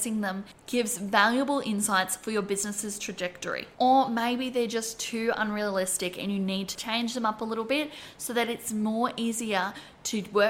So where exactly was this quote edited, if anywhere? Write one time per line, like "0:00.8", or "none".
0:03.7
0:06.8